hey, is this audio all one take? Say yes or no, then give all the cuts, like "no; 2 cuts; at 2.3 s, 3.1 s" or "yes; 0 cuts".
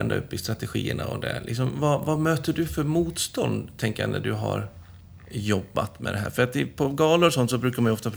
yes; 0 cuts